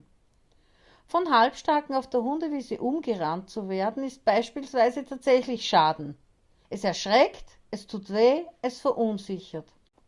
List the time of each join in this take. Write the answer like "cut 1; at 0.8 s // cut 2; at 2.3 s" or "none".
cut 1; at 6.6 s